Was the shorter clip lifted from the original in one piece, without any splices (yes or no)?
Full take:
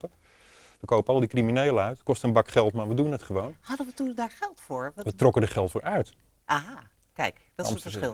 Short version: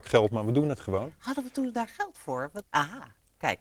no